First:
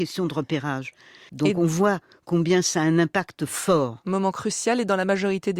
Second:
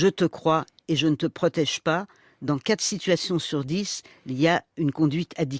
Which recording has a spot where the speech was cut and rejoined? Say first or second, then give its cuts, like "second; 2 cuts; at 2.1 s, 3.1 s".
first; 1 cut; at 1.3 s